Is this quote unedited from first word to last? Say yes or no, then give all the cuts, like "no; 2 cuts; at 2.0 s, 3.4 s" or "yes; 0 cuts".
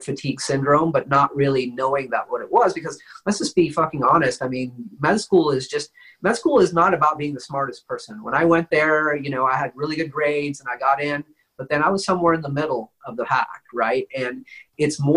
yes; 0 cuts